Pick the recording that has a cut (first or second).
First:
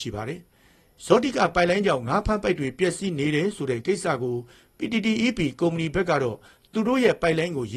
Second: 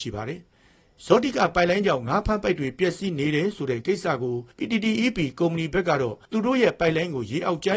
second